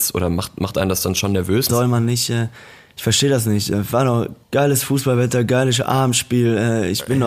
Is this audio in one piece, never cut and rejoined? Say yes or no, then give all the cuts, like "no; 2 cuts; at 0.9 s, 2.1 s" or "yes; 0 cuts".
no; 2 cuts; at 1.7 s, 4.4 s